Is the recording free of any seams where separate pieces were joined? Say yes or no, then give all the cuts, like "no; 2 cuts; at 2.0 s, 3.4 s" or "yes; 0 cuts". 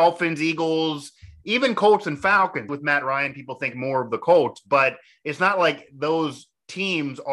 no; 1 cut; at 2.7 s